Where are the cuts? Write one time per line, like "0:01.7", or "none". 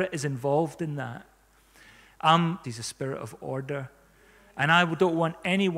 0:02.6